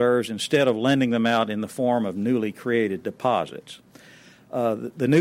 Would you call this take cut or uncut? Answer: uncut